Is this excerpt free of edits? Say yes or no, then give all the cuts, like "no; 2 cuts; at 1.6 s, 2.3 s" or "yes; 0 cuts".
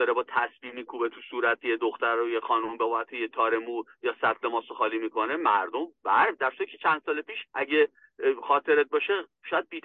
no; 1 cut; at 7.5 s